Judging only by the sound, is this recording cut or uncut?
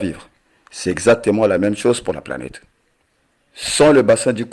uncut